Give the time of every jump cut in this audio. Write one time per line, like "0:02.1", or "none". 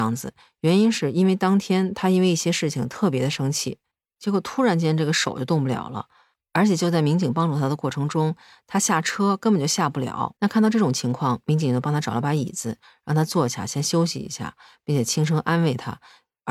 0:10.4